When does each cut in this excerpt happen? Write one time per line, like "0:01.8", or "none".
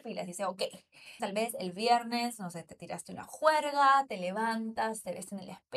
0:01.2